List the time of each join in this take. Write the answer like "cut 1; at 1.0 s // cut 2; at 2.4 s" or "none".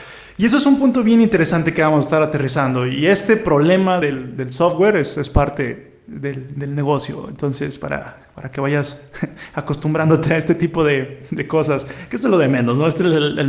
none